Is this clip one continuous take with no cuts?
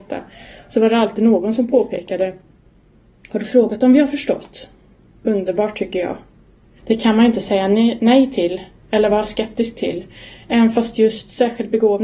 no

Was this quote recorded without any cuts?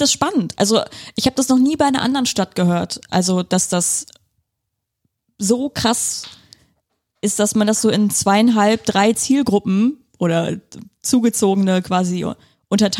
yes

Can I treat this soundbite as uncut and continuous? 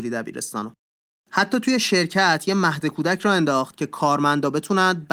no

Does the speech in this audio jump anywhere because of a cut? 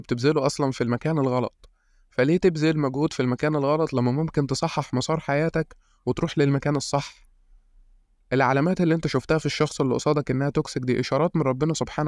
no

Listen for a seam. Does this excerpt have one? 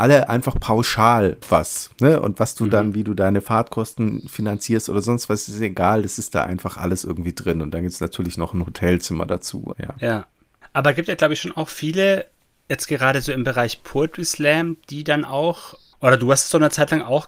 yes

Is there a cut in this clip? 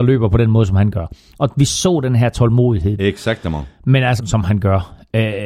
yes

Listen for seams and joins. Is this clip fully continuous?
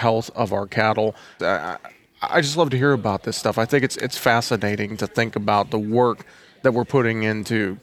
no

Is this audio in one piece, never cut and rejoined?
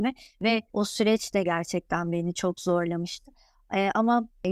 yes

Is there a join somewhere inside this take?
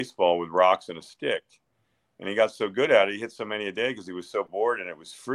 no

